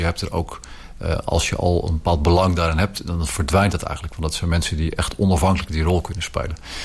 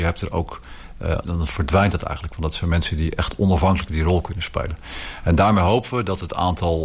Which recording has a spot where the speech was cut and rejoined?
second; 1 cut; at 1.2 s

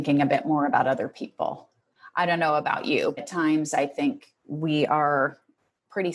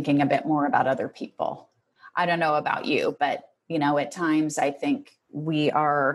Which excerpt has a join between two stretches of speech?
first; 1 cut; at 3.2 s

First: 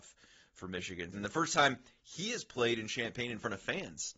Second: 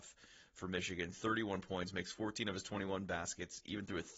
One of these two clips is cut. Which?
first; 1 cut; at 1.1 s

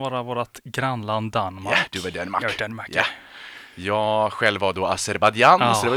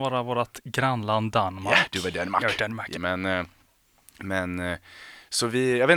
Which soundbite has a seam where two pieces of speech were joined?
second; 1 cut; at 2.9 s

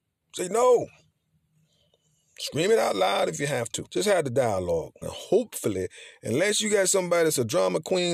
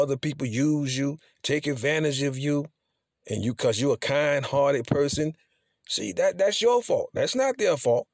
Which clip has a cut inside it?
first; 2 cuts; at 3.9 s, 5.0 s

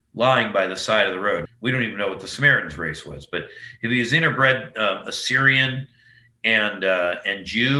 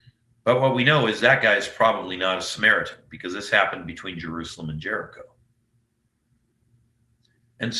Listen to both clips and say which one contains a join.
first; 1 cut; at 1.5 s

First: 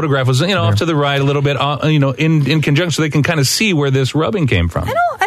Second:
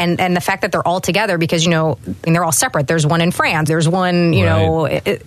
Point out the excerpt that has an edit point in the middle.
second; 2 cuts; at 2.3 s, 3.7 s

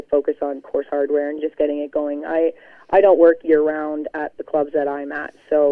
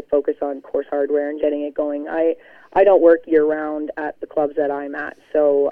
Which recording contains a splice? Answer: second; 1 cut; at 1.4 s

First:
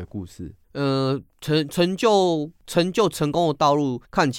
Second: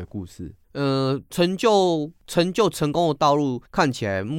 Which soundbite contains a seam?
second; 1 cut; at 1.3 s

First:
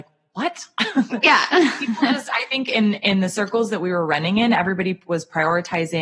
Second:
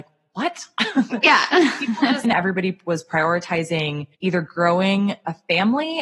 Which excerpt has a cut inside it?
second; 2 cuts; at 2.2 s, 4.1 s

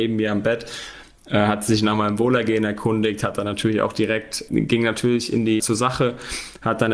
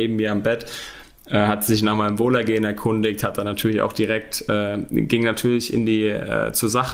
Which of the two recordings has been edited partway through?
first; 2 cuts; at 4.5 s, 5.6 s

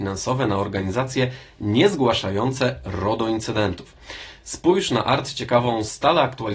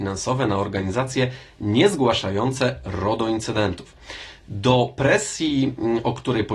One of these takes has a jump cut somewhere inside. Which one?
first; 1 cut; at 4.4 s

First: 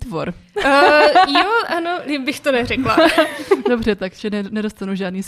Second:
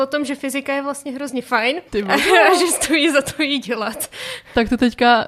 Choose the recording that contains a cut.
second; 1 cut; at 1.9 s

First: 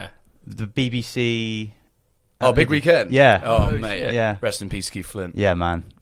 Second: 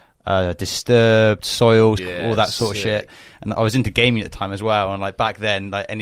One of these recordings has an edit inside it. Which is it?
second; 1 cut; at 2.0 s

